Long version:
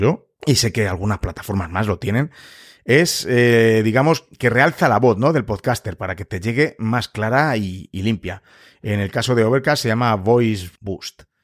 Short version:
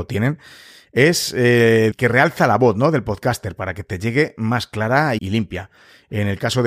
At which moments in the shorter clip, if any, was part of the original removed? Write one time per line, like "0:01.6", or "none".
0:01.9
0:05.2